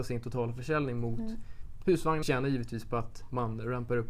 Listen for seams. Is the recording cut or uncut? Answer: cut